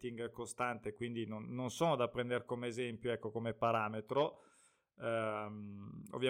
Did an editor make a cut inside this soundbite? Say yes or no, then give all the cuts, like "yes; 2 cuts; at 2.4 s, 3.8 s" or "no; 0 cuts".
no; 0 cuts